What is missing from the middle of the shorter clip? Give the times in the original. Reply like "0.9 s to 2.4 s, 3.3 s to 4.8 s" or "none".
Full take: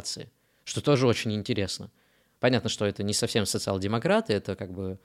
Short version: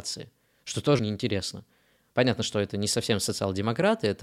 1.0 s to 1.2 s